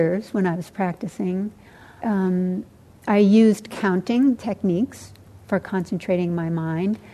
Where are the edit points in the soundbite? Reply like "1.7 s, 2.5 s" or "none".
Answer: 2.0 s, 4.4 s